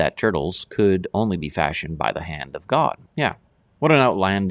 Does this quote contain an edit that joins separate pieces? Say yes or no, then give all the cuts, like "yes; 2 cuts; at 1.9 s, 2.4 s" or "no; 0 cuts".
yes; 1 cut; at 3.1 s